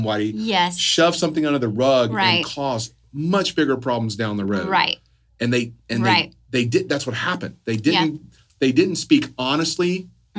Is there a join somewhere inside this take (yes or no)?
no